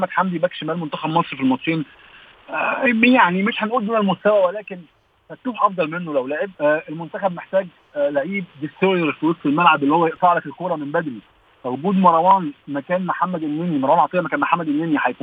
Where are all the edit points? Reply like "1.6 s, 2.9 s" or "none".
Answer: 6.5 s

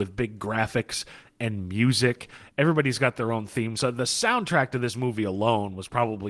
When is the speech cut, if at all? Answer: none

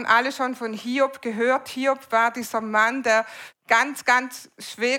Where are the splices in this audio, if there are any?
3.5 s

